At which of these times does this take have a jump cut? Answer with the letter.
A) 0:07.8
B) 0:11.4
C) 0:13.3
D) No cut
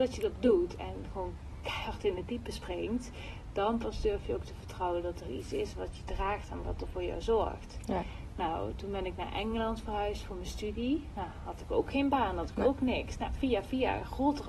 D